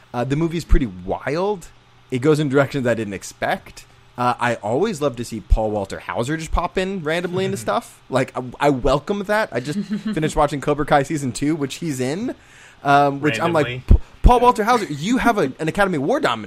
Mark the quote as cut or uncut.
uncut